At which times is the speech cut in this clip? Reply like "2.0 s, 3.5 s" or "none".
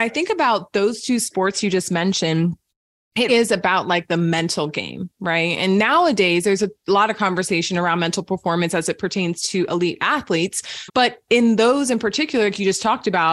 3.3 s, 10.9 s